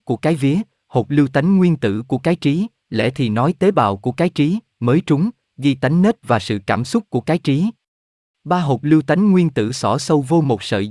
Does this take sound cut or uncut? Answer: cut